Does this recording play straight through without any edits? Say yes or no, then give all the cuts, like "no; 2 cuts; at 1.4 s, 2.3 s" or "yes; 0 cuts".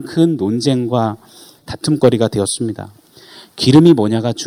yes; 0 cuts